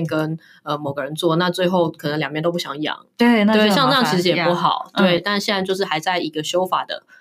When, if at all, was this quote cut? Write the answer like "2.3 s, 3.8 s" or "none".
5.2 s